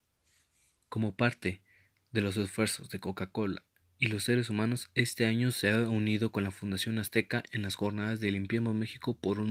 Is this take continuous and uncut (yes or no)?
yes